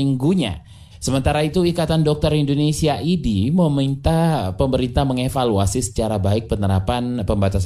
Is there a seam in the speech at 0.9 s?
yes; 1 cut; at 0.9 s

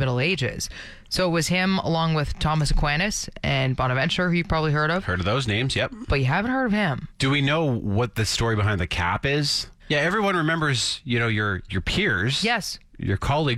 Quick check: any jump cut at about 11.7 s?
yes; 3 cuts; at 7.1 s, 9.8 s, 11.7 s

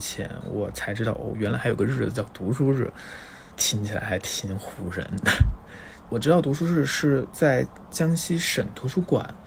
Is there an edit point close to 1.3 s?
no; 0 cuts

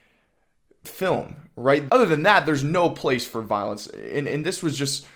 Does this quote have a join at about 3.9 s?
no; 1 cut; at 1.9 s

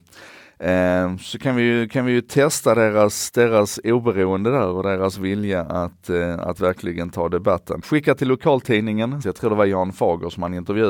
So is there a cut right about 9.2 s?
yes; 2 cuts; at 7.8 s, 9.2 s

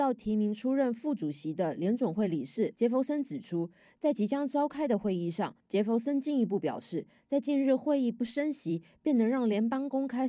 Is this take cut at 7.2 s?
no; 1 cut; at 5.6 s

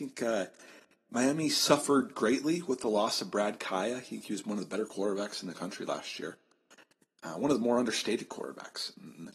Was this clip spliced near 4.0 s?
no; 0 cuts

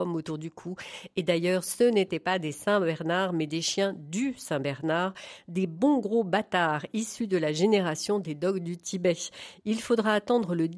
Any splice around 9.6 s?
no; 0 cuts

